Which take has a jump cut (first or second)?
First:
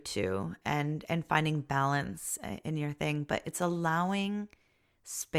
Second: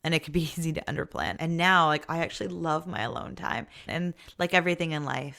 second